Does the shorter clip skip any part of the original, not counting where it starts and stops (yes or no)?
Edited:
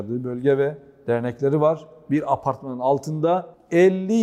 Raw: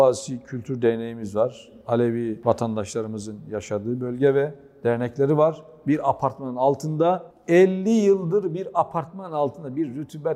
no